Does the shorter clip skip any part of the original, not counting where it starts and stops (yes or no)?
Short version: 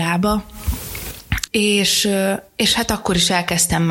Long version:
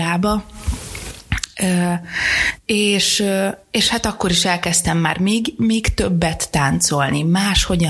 yes